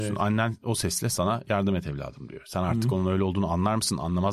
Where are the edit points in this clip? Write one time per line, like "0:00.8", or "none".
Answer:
none